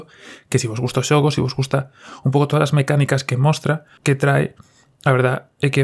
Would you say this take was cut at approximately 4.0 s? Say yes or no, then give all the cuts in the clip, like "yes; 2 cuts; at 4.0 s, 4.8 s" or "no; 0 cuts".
yes; 1 cut; at 4.0 s